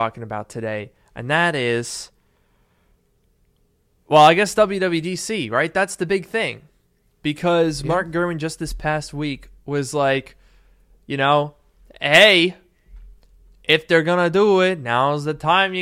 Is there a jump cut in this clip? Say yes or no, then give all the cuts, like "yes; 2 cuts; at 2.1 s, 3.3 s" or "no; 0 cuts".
no; 0 cuts